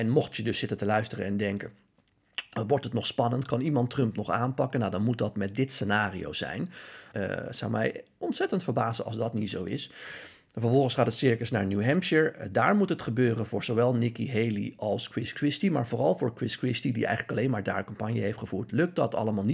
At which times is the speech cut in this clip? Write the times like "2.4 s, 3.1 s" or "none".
7.1 s

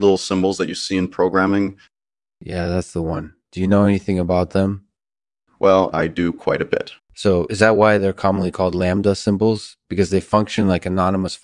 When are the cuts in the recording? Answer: 5.9 s, 7.0 s

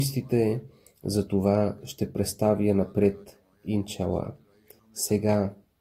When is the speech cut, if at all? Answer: 4.8 s

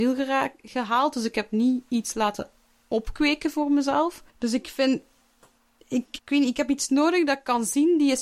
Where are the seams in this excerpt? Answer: 4.3 s, 6.2 s

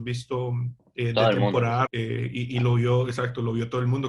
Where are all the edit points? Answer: 1.9 s

